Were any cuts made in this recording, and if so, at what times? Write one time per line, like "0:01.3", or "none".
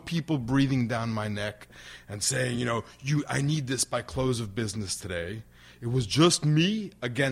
none